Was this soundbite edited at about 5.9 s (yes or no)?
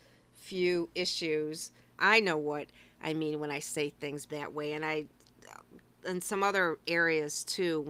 no